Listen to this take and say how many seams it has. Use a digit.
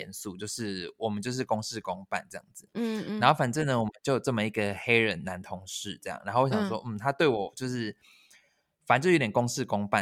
0